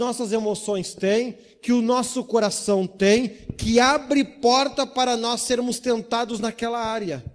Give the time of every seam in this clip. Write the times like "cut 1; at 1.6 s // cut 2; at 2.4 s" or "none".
none